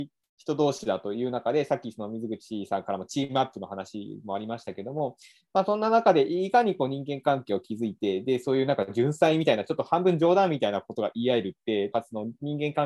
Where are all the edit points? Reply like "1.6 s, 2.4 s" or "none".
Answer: 11.9 s